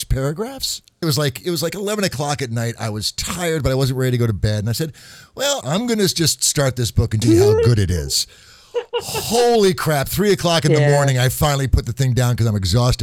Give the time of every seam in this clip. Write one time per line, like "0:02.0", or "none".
0:01.0
0:05.6
0:07.2